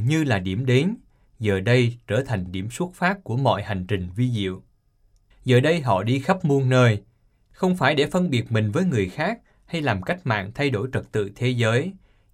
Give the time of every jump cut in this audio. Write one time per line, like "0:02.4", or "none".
0:05.3